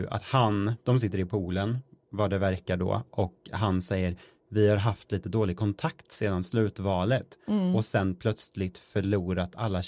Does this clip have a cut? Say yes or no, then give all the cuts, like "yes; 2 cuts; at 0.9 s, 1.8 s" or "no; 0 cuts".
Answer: no; 0 cuts